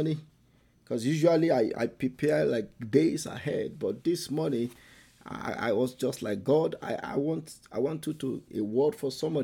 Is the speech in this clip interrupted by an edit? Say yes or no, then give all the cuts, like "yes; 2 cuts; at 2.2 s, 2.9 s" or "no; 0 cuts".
yes; 1 cut; at 8.5 s